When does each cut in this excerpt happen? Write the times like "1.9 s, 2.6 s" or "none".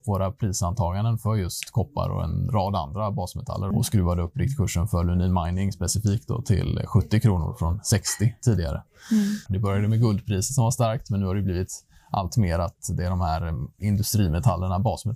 3.7 s, 9.5 s